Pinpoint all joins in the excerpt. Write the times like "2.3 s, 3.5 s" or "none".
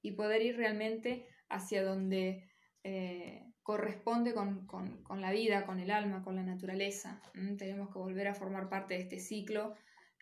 3.6 s